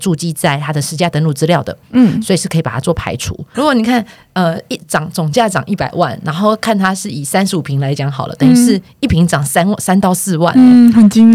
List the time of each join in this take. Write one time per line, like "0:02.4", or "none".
0:03.5